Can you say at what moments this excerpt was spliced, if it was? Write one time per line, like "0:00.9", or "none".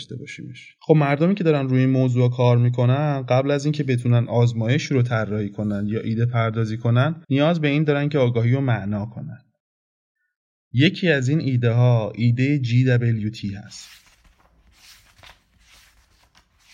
0:07.2